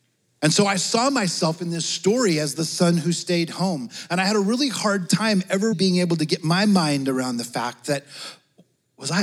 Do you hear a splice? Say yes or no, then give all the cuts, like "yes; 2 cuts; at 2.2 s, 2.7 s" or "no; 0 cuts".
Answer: yes; 1 cut; at 5.7 s